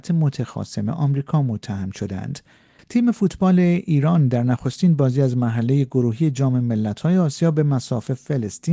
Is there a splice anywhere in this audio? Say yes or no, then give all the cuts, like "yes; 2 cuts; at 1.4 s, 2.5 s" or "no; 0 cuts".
yes; 1 cut; at 2.8 s